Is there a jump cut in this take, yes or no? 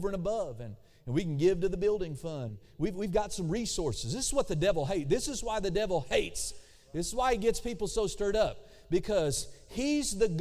yes